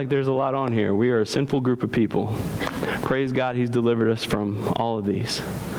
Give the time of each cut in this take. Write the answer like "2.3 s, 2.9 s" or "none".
none